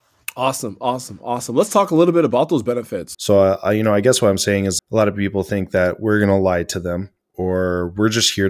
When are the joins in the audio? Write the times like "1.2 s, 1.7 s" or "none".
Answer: 3.1 s, 4.8 s